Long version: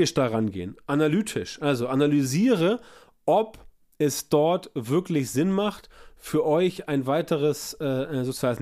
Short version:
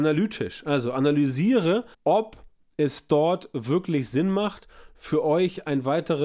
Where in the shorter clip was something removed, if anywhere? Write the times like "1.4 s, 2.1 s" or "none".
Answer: 1.9 s